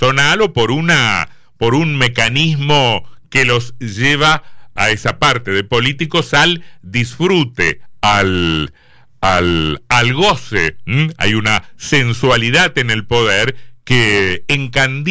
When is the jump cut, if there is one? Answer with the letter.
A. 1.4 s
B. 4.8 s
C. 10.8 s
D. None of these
B